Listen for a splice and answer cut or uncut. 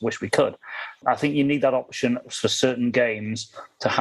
cut